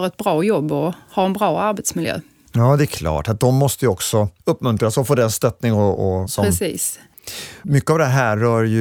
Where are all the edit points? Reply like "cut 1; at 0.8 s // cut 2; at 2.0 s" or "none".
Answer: cut 1; at 6.3 s

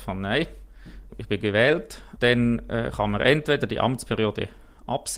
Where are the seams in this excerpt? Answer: cut 1; at 1.1 s // cut 2; at 2.2 s

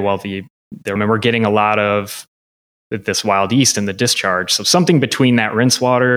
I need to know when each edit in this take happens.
cut 1; at 1.0 s

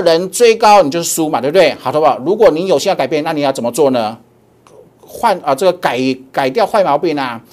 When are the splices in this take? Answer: none

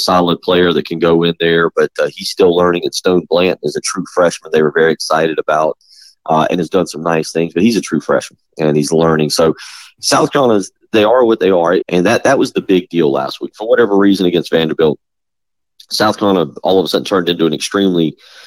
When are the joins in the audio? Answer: cut 1; at 11.8 s

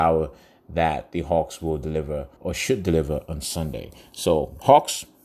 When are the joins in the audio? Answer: cut 1; at 2.4 s

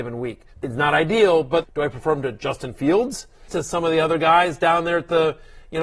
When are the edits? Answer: cut 1; at 1.6 s // cut 2; at 3.5 s

